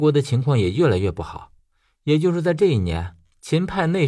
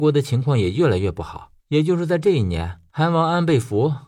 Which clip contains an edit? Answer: second; 2 cuts; at 1.6 s, 2.9 s

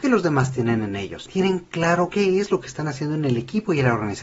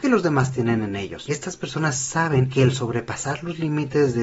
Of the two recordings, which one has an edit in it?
first; 1 cut; at 1.3 s

